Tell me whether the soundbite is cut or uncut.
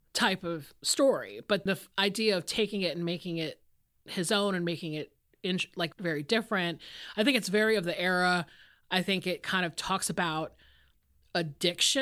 cut